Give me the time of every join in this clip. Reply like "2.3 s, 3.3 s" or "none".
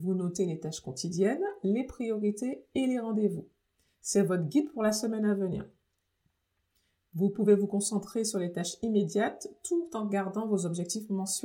none